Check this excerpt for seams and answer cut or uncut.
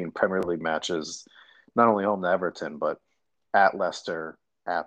uncut